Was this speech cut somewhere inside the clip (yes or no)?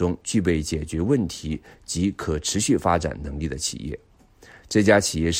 no